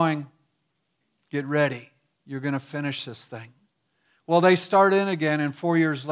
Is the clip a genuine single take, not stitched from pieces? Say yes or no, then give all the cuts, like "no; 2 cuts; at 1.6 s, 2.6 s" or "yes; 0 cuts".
yes; 0 cuts